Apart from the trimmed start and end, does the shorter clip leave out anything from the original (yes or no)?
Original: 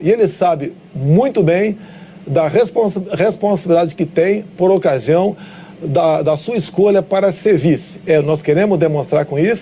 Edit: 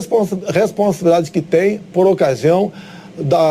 no